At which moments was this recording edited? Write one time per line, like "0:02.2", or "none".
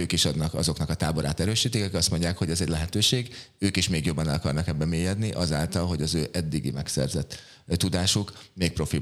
none